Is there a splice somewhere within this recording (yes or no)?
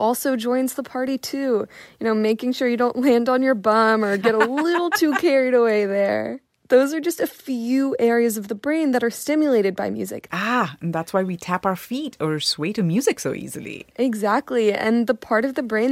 yes